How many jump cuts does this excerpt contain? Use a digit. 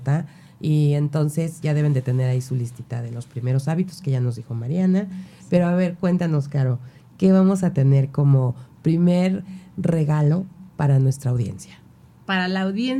1